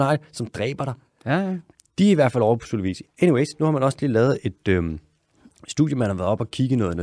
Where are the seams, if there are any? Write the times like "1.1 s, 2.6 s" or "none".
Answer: none